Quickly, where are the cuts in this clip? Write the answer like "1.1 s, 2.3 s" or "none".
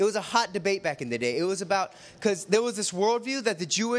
none